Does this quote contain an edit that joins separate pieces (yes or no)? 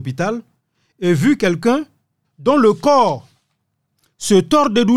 yes